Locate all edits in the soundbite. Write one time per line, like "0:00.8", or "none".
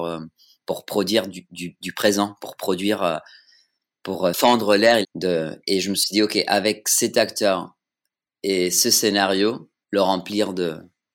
0:05.0
0:09.8